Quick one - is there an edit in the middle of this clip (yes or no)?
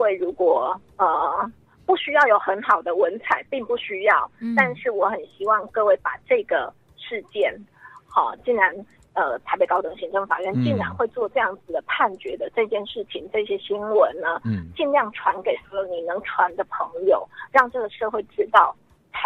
no